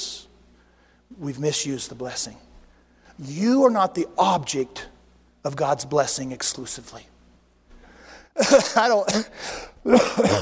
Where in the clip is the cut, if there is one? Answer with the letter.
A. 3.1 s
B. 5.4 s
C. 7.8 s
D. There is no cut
C